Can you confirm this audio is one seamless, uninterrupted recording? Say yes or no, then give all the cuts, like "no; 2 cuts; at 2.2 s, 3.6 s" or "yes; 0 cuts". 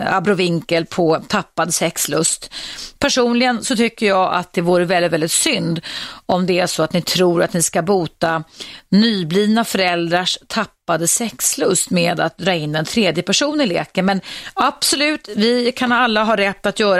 yes; 0 cuts